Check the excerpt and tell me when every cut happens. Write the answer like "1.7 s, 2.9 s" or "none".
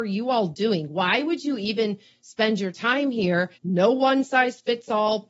3.6 s